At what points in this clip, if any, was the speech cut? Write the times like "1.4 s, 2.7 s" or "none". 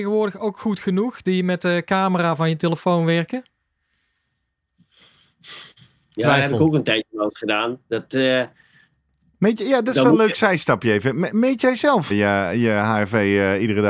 12.1 s